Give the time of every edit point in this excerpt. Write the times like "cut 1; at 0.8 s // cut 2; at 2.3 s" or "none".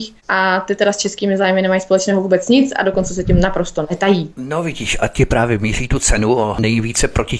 cut 1; at 4.3 s